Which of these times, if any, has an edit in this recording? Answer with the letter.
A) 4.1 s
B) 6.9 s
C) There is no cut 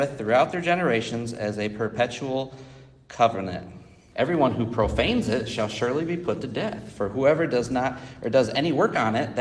A